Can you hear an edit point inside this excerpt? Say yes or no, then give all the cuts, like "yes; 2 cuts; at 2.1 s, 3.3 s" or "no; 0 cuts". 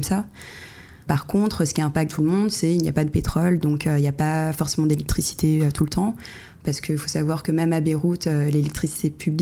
yes; 1 cut; at 2.1 s